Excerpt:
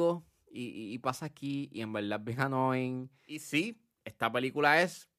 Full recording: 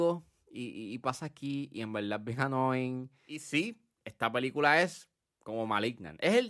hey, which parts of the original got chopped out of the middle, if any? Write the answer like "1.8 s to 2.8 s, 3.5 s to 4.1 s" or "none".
none